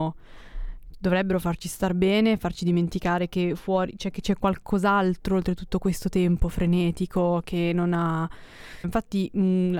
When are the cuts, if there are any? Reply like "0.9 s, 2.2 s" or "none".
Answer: 8.8 s